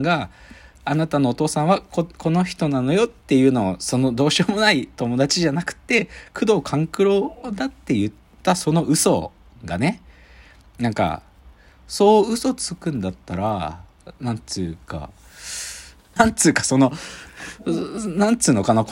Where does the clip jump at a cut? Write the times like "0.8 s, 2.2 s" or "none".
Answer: 16.2 s